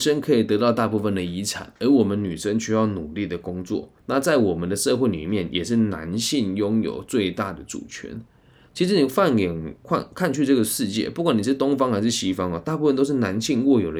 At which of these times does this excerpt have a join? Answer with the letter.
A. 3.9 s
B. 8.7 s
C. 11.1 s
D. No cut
D